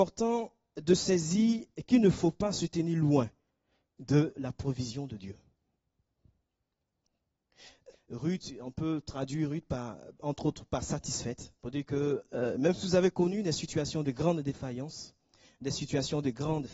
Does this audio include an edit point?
yes; 2 cuts; at 7.9 s, 11.6 s

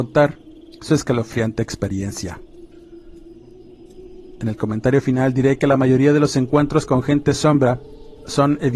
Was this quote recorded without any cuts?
no; 1 cut; at 4.4 s

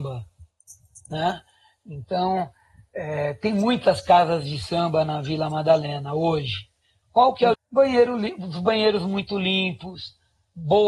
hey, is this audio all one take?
no; 1 cut; at 7.5 s

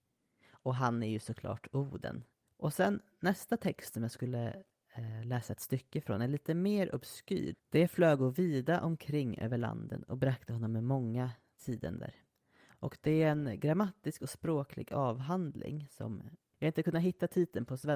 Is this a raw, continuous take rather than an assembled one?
no; 2 cuts; at 7.5 s, 12.7 s

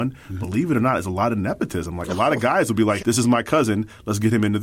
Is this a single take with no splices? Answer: no; 1 cut; at 3.0 s

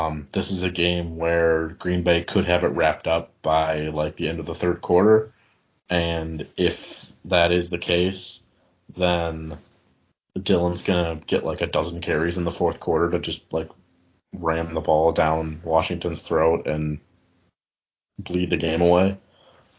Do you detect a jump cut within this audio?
no; 0 cuts

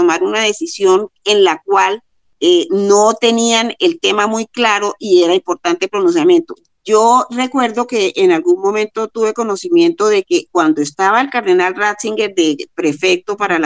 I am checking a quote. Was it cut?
yes; 2 cuts; at 6.7 s, 10.5 s

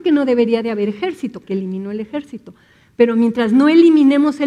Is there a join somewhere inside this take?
yes; 1 cut; at 1.4 s

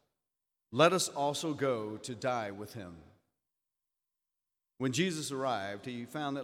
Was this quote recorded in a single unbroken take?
yes; 0 cuts

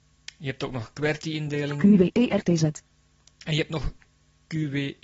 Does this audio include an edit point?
no; 0 cuts

